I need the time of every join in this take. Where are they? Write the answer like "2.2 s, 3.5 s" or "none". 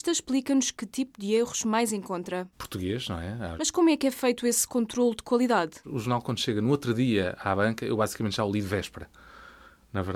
2.5 s, 3.6 s